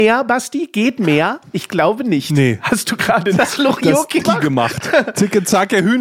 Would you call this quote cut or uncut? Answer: cut